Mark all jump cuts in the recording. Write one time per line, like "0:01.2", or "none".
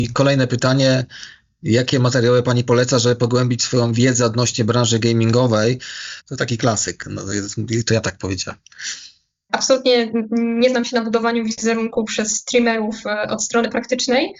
0:06.2
0:09.5